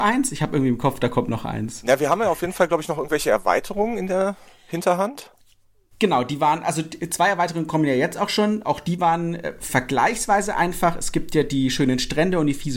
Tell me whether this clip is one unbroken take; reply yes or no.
yes